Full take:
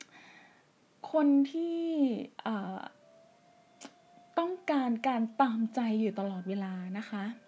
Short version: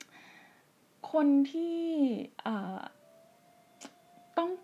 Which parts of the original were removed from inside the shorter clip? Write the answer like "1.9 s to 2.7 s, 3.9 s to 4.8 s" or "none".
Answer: none